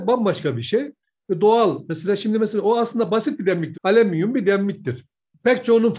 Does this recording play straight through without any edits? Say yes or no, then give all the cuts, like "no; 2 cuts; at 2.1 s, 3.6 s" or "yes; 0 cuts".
no; 1 cut; at 3.7 s